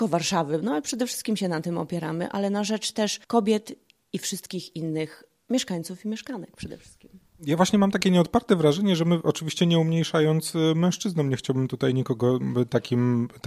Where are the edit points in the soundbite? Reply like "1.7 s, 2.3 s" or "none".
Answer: 3.2 s